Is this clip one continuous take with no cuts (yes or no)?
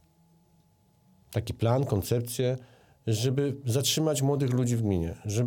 yes